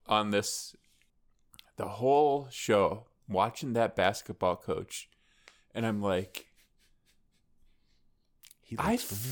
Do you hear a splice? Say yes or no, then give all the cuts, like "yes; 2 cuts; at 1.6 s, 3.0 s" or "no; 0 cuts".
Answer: no; 0 cuts